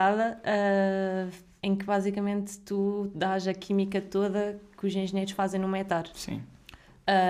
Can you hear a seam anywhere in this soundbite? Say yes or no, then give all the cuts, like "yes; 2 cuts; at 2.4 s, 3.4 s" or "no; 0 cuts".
yes; 2 cuts; at 1.6 s, 6.1 s